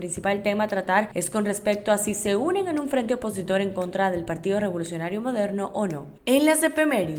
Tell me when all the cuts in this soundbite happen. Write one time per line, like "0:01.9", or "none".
0:06.2